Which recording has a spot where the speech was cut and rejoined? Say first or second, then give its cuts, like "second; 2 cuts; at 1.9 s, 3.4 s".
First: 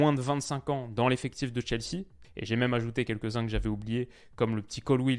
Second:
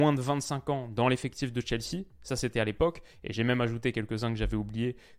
first; 1 cut; at 2.2 s